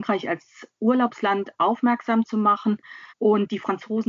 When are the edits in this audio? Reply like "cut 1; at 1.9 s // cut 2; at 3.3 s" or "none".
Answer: cut 1; at 3.1 s